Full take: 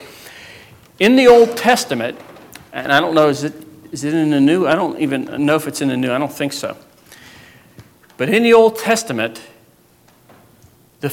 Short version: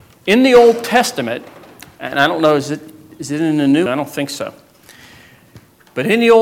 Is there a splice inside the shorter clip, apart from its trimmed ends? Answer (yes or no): yes